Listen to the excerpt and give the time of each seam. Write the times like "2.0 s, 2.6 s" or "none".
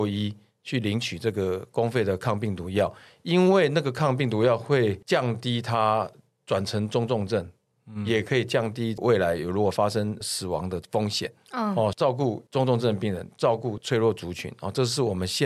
5.0 s, 11.9 s

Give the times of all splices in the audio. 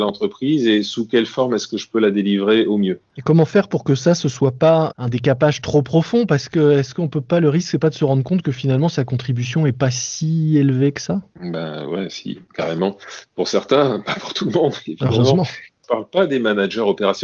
none

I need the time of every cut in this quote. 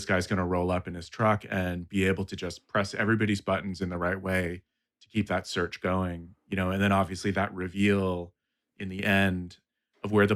none

